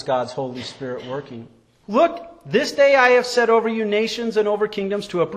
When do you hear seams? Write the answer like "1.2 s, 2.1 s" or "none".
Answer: 1.8 s